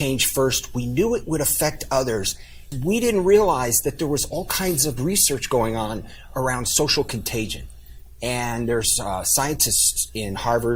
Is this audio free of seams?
no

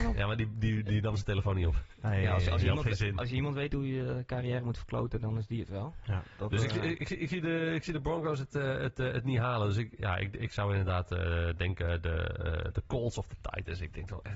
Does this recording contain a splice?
no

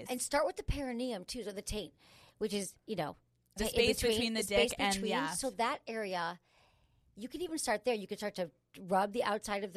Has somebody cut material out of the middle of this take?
yes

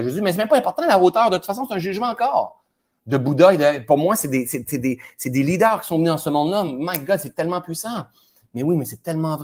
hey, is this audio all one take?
yes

